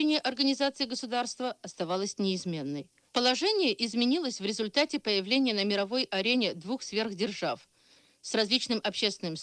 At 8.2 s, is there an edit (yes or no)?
no